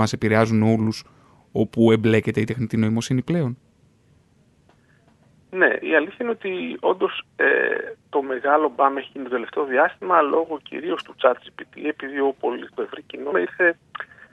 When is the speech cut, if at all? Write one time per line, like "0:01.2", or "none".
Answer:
0:05.8
0:13.3